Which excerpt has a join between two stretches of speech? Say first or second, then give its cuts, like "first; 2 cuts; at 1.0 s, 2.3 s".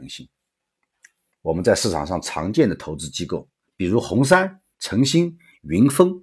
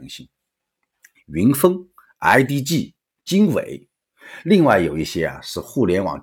second; 1 cut; at 1.1 s